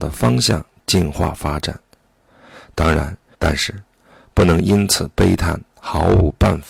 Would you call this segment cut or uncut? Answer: cut